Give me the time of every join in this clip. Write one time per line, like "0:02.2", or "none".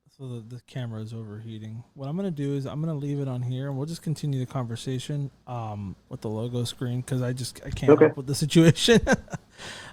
0:06.1